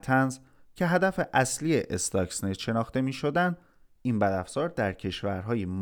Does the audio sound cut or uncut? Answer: uncut